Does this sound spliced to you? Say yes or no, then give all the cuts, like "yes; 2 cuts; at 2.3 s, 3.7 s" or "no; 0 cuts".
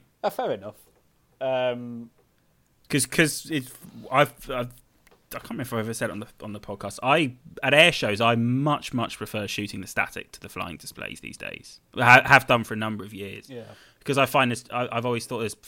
no; 0 cuts